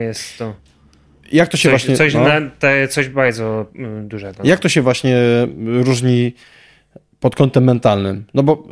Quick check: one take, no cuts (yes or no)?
yes